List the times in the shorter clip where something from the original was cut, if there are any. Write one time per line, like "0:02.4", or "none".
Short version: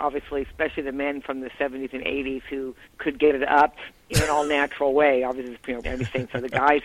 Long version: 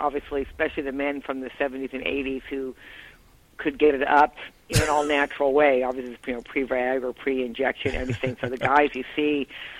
0:02.8
0:05.8